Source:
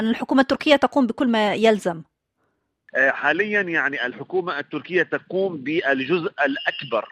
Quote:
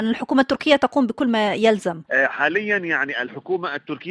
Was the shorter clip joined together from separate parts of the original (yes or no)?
yes